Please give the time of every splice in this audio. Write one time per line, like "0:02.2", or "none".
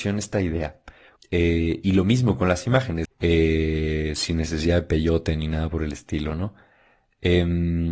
0:01.2
0:03.0